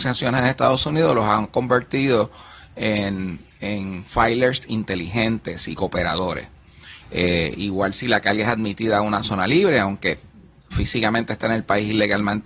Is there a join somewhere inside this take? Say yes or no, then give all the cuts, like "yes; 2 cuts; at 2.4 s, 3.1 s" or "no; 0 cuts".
yes; 1 cut; at 7.0 s